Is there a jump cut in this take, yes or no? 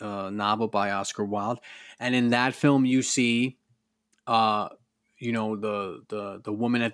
no